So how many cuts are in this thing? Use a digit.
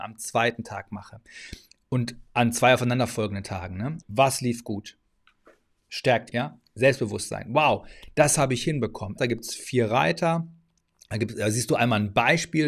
3